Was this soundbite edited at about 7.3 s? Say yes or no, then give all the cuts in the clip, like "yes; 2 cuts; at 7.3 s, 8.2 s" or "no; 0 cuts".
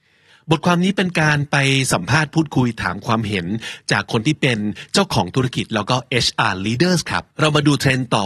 yes; 1 cut; at 7.3 s